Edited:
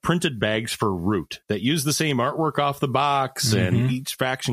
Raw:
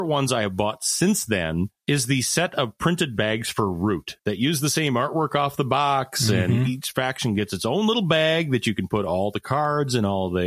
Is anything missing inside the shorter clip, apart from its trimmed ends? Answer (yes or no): no